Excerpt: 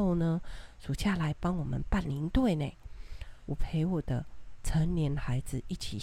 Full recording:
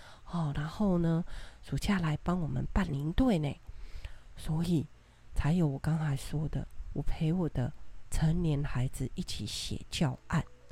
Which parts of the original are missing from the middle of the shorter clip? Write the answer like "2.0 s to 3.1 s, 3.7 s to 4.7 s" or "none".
4.3 s to 6.9 s